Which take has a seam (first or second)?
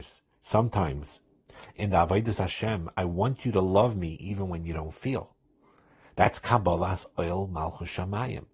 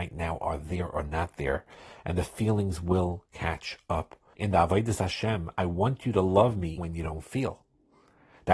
second